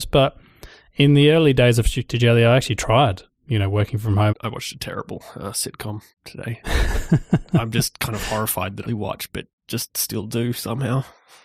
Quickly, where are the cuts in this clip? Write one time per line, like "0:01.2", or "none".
0:04.3
0:06.1
0:08.8